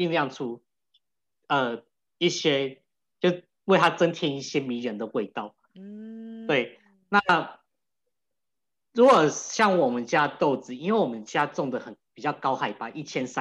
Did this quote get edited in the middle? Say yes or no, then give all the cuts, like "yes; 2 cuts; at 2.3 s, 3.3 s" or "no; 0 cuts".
no; 0 cuts